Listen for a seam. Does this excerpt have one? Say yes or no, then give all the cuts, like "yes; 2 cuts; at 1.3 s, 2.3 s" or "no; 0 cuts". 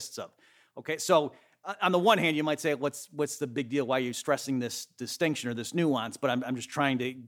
no; 0 cuts